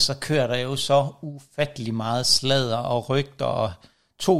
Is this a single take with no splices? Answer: yes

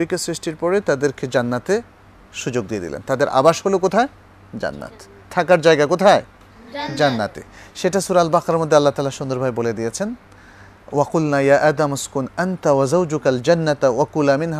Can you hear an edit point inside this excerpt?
no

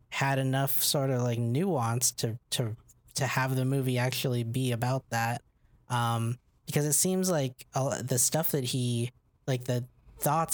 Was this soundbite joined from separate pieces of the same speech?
no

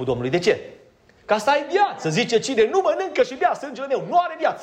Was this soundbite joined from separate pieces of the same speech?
no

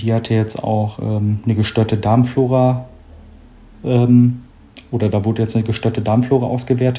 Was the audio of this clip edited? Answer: no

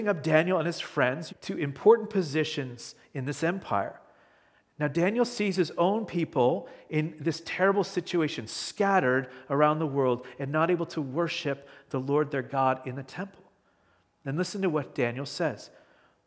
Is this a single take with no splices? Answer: no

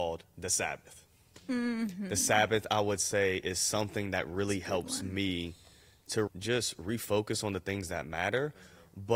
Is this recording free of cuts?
no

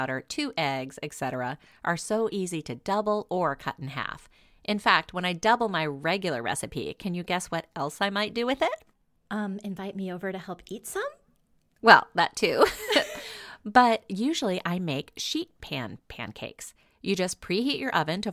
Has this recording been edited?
no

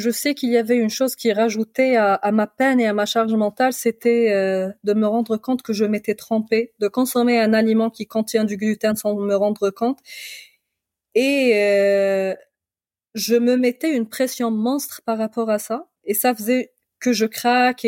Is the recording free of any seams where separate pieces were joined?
no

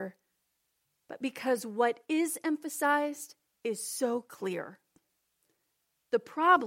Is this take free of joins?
yes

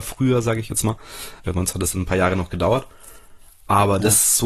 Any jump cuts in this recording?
yes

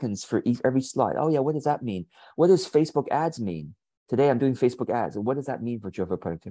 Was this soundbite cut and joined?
no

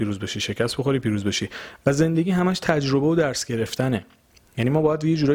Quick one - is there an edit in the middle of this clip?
no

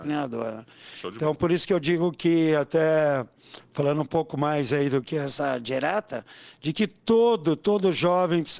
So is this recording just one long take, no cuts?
yes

